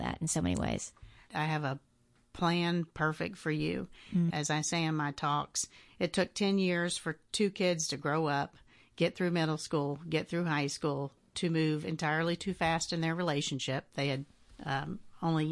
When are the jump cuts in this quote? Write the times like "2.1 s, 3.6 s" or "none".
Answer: 1.3 s, 4.3 s